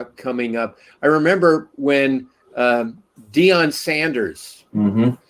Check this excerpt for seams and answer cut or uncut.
cut